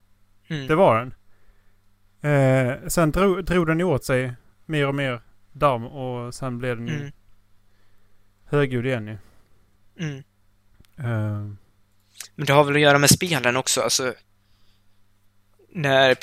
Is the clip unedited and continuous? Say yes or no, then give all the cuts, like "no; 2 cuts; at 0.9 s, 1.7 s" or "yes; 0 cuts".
yes; 0 cuts